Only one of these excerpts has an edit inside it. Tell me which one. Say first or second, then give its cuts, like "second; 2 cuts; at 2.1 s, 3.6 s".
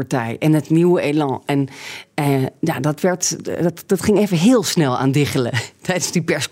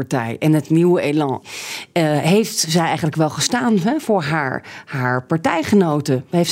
second; 1 cut; at 1.4 s